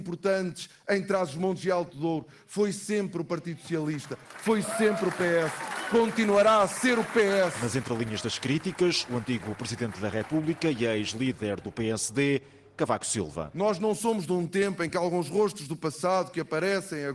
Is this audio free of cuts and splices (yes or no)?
yes